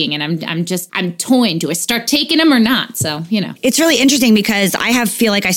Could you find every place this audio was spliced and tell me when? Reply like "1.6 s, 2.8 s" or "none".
none